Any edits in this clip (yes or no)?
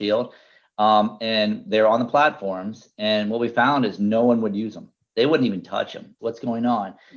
yes